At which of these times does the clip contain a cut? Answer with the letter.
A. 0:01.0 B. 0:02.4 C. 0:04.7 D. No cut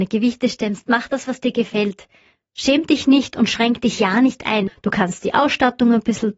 C